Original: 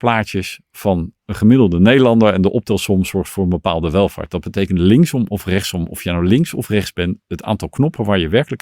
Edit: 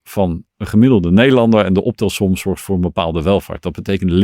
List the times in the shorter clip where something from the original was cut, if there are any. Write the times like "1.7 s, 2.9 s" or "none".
none